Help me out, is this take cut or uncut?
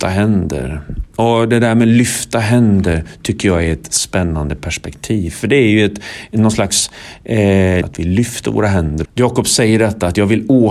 cut